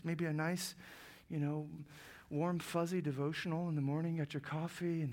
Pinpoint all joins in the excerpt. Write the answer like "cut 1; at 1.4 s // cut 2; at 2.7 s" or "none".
none